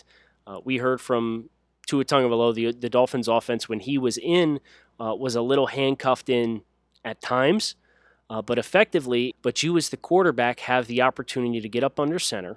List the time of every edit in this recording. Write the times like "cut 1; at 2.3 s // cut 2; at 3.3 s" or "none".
cut 1; at 9.3 s